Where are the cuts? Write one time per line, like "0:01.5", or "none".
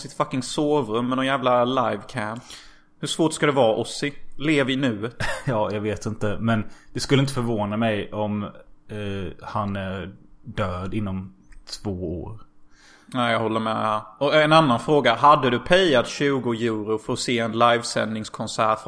none